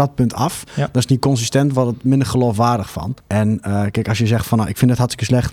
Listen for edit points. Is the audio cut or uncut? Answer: cut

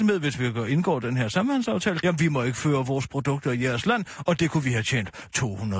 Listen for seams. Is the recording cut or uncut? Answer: cut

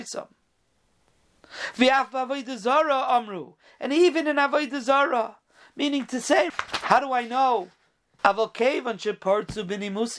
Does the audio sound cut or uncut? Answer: cut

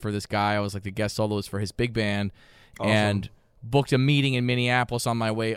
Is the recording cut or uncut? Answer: uncut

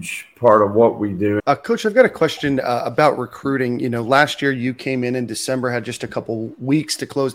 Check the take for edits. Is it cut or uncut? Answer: cut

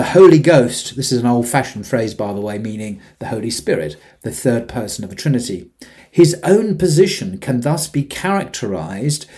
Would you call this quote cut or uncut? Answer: cut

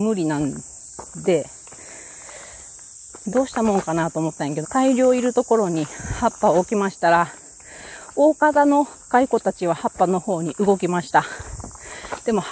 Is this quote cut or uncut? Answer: cut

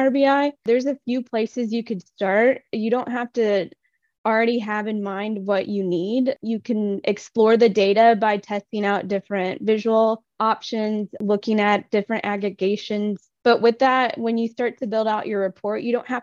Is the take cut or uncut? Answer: uncut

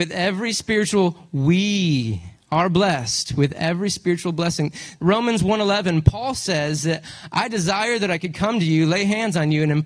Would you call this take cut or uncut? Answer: cut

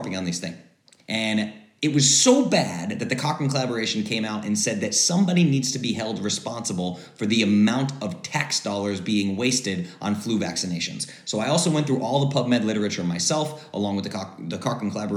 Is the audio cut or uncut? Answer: cut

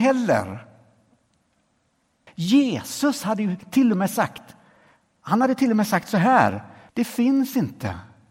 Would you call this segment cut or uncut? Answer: cut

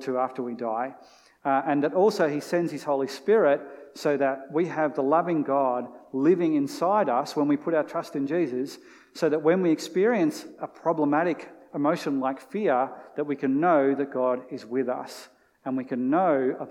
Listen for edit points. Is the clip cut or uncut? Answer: uncut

